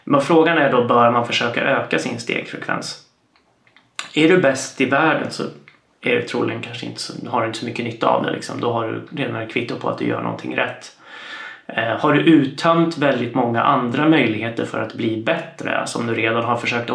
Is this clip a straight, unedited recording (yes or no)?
yes